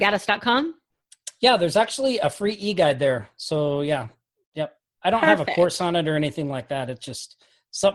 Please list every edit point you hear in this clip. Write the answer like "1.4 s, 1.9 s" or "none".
none